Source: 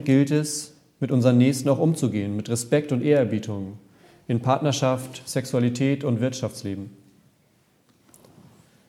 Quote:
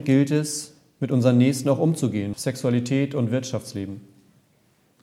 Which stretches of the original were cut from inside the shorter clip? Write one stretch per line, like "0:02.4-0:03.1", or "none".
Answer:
0:02.3-0:05.2